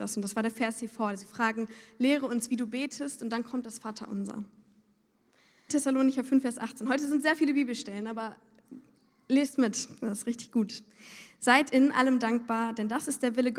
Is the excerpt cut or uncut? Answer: cut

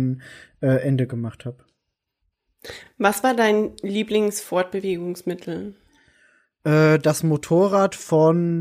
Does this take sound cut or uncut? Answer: uncut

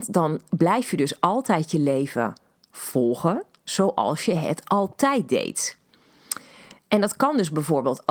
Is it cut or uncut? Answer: uncut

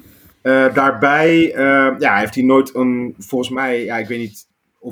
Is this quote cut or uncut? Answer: uncut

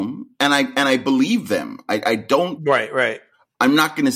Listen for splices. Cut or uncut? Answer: uncut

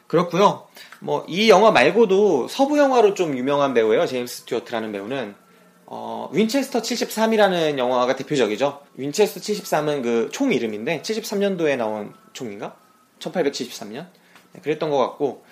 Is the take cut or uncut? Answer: cut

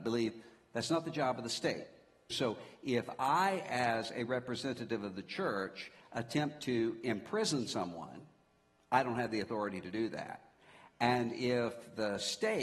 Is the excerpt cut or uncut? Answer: cut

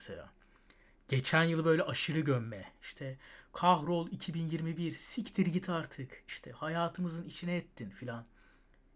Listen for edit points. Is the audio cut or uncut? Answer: uncut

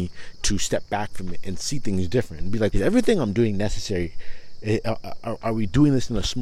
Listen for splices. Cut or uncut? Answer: cut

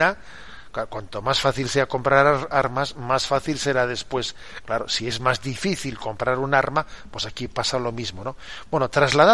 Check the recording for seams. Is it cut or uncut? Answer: uncut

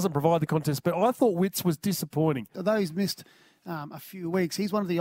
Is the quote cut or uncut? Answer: cut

